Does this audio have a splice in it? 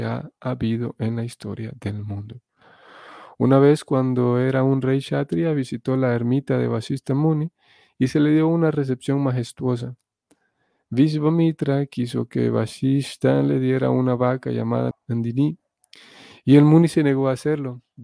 yes; 1 cut; at 14.9 s

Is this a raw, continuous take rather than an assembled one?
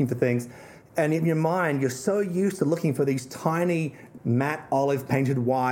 no; 1 cut; at 4.2 s

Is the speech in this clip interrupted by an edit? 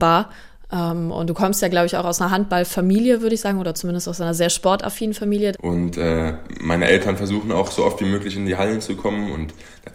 yes; 1 cut; at 5.5 s

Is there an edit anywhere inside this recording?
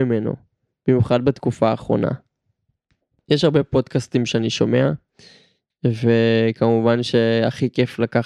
no; 0 cuts

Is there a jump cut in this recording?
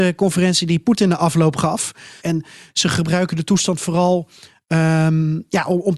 yes; 1 cut; at 2.2 s

